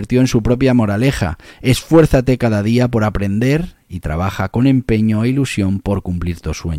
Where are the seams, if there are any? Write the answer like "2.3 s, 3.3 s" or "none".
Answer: none